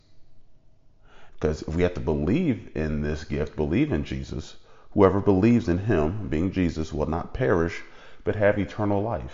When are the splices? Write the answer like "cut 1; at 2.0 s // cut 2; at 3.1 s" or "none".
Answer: cut 1; at 1.3 s